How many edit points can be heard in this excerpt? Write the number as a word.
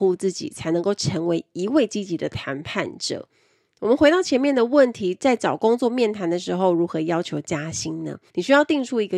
one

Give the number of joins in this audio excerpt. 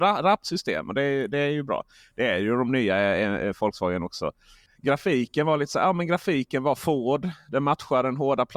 zero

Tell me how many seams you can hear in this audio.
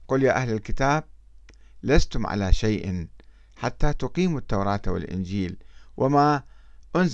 zero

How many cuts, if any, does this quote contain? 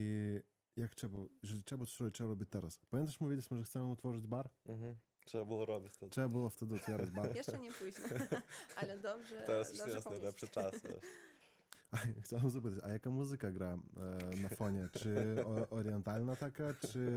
zero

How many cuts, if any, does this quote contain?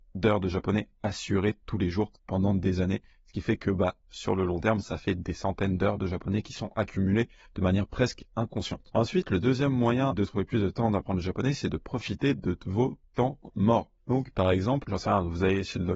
one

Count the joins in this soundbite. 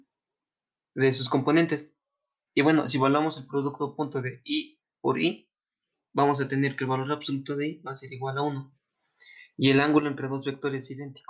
one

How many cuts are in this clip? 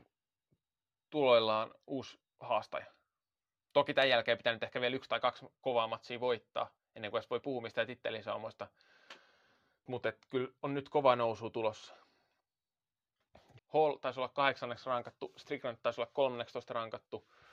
two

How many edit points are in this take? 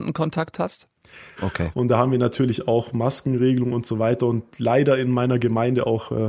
one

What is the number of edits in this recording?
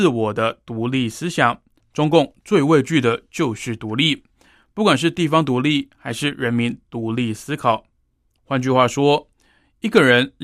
zero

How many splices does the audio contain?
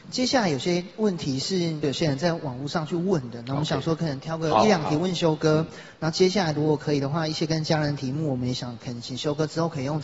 one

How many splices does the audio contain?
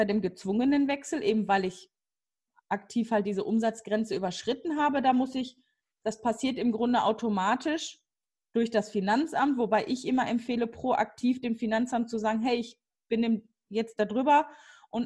zero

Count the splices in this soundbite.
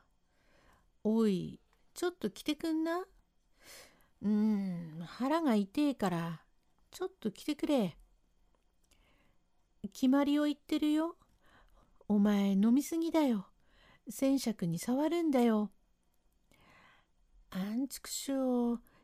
one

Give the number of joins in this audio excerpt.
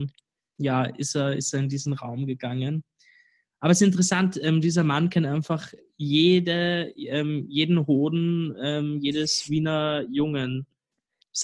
zero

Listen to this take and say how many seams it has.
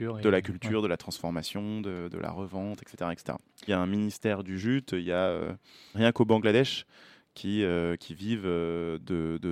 two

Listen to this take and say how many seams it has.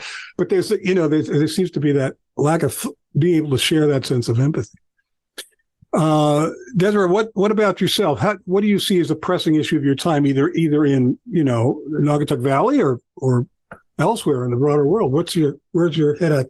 zero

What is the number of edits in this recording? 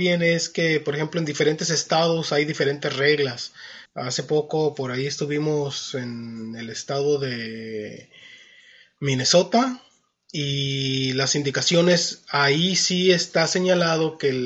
one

